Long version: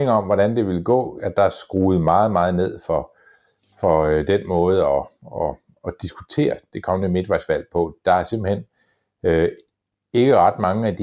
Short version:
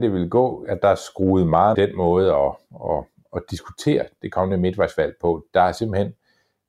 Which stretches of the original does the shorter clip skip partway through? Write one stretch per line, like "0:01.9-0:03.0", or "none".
0:02.3-0:04.3